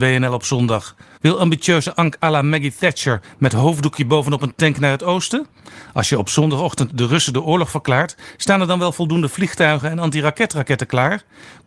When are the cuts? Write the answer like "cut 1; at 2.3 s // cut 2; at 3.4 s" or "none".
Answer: cut 1; at 1.2 s